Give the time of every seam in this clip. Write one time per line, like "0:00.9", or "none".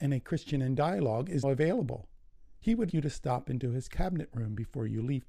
0:01.4
0:02.9